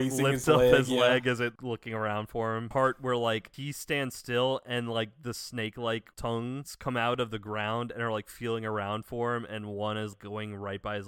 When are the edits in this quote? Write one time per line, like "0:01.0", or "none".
0:02.7